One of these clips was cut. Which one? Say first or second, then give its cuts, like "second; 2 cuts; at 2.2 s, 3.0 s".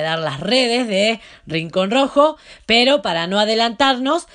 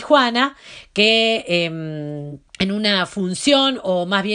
second; 1 cut; at 2.5 s